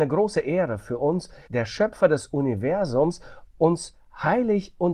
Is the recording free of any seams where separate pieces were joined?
no; 2 cuts; at 1.5 s, 3.5 s

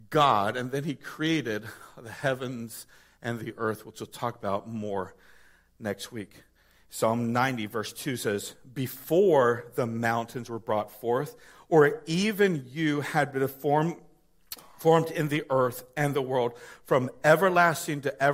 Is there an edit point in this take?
no; 0 cuts

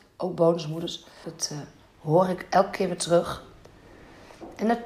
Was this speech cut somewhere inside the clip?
yes; 1 cut; at 1.2 s

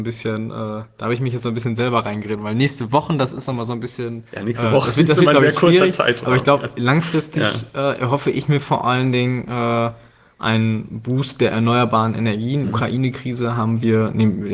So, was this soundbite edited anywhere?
yes; 1 cut; at 12.6 s

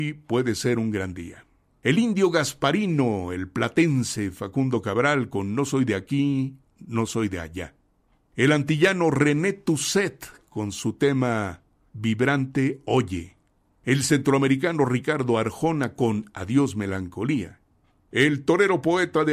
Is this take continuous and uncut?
yes; 0 cuts

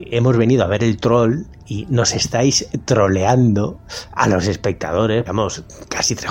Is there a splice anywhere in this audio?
yes; 1 cut; at 5.3 s

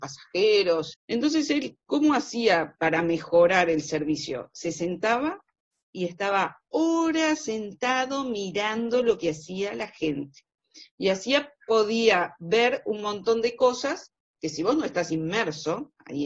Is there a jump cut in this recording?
yes; 1 cut; at 0.9 s

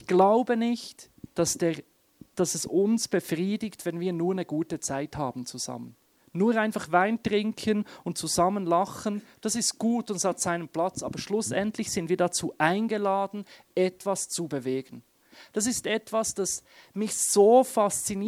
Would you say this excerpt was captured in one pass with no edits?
yes; 0 cuts

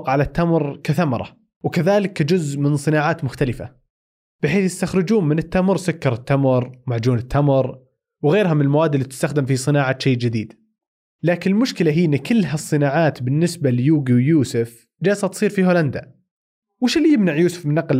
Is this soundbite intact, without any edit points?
yes; 0 cuts

